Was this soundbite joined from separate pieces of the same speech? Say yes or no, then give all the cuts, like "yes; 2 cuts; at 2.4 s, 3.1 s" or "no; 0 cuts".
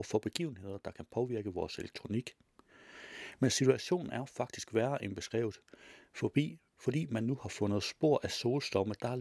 no; 0 cuts